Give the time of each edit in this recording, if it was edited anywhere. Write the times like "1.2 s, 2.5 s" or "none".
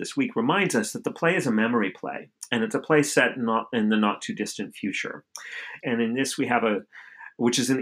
5.8 s

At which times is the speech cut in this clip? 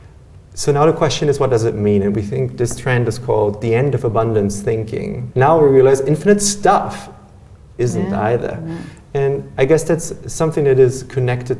5.3 s

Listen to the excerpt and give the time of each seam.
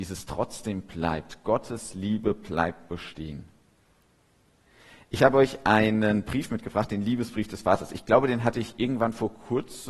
none

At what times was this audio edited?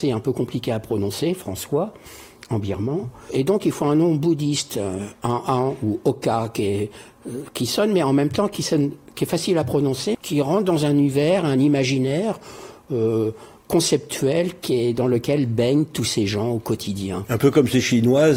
10.1 s, 11.4 s

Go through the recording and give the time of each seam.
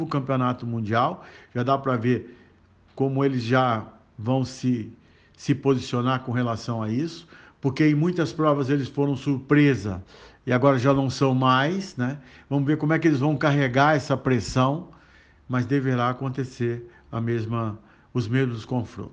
none

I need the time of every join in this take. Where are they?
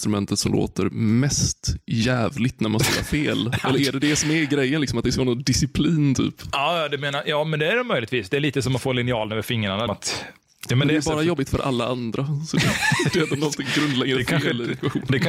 9.9 s

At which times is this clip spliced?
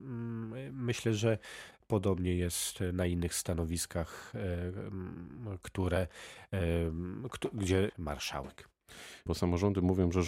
7.9 s, 9.3 s

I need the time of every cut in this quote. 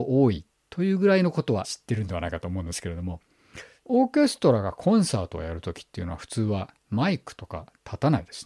1.6 s, 6.8 s

